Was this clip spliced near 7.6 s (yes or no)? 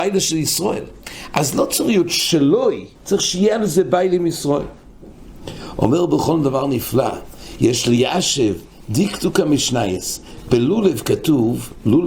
no